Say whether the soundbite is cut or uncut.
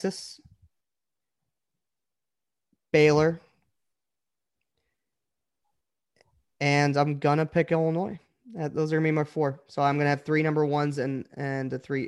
uncut